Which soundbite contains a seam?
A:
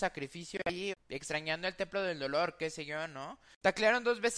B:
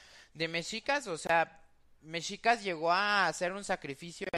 A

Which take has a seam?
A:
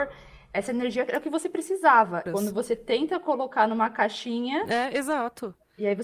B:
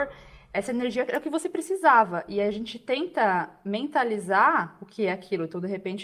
A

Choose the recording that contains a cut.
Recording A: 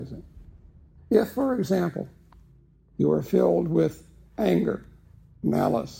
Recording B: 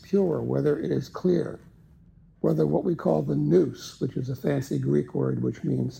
A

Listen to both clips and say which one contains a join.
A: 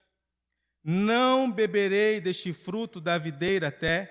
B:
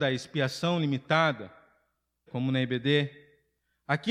B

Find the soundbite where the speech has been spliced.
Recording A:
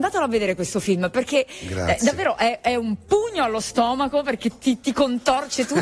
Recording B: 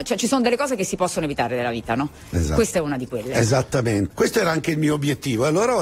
B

